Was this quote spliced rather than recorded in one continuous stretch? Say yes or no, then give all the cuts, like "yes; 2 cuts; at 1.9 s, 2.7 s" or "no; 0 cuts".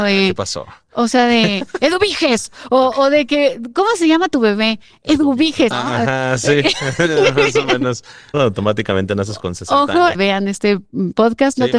yes; 3 cuts; at 5.7 s, 8.3 s, 10.1 s